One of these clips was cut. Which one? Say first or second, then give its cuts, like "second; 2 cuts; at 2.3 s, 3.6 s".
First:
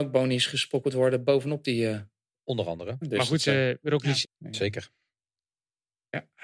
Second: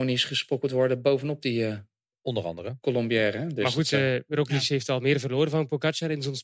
first; 2 cuts; at 3.0 s, 4.2 s